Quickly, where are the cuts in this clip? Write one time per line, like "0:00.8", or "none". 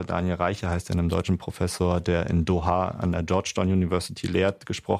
none